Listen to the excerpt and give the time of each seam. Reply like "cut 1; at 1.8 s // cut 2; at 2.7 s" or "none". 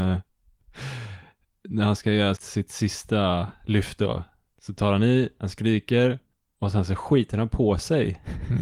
cut 1; at 2.4 s